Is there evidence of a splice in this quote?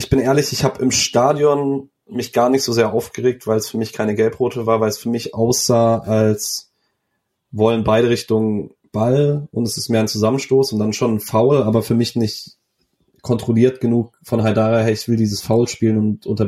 no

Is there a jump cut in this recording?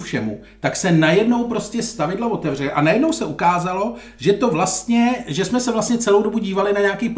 no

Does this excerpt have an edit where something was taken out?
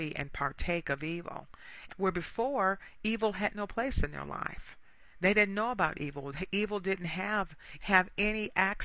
yes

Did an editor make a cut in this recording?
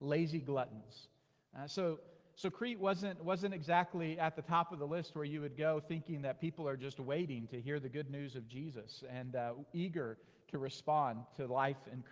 no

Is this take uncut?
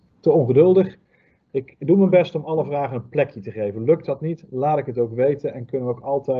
yes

